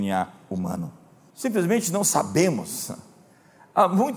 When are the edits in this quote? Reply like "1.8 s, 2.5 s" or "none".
1.3 s